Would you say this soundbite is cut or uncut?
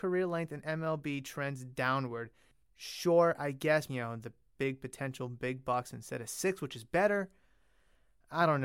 cut